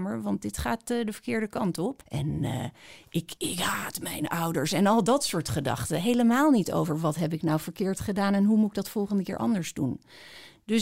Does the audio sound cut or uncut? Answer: cut